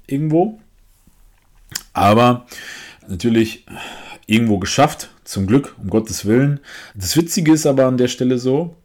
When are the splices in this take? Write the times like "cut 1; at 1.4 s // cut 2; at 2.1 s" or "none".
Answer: cut 1; at 3.0 s // cut 2; at 6.9 s

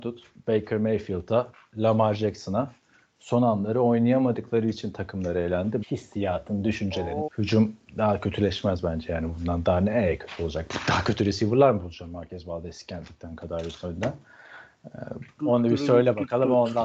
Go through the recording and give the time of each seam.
cut 1; at 5.8 s // cut 2; at 7.3 s // cut 3; at 15.4 s

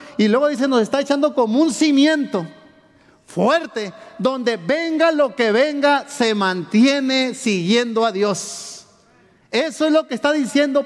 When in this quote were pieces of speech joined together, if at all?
none

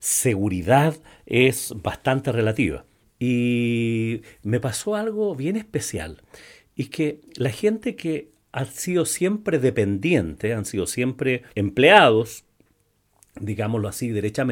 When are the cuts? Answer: cut 1; at 3.0 s // cut 2; at 11.5 s

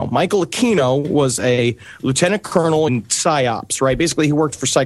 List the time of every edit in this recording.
cut 1; at 2.9 s

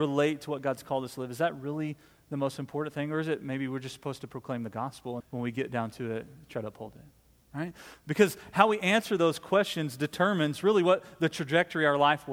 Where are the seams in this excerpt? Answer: cut 1; at 5.2 s

